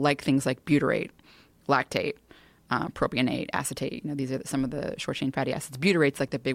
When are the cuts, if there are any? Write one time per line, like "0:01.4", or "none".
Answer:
none

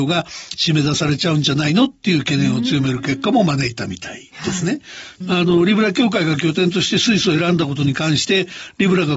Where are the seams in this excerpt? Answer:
0:05.2

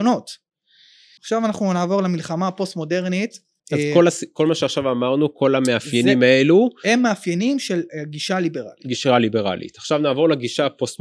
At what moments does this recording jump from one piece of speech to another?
0:01.2
0:03.6

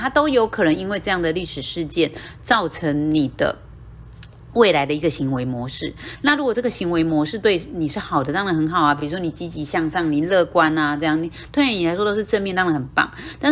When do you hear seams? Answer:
none

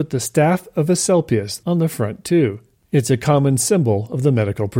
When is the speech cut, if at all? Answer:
0:01.6

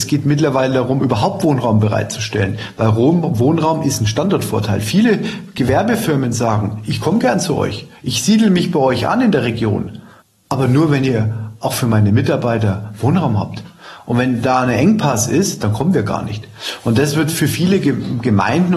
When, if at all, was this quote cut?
none

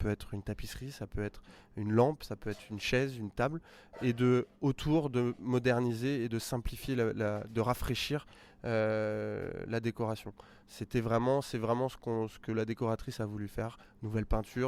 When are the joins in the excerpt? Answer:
none

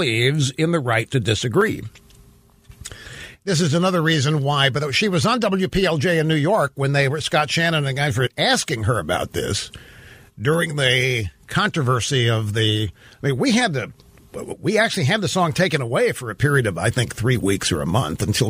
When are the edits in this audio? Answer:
none

